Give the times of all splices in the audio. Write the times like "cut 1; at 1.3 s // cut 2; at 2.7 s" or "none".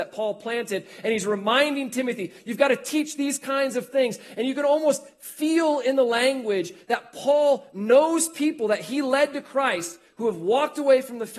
none